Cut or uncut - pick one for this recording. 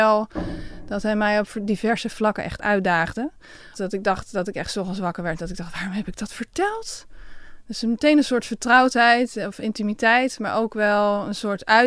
cut